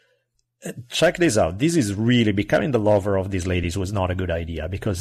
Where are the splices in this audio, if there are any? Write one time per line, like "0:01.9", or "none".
none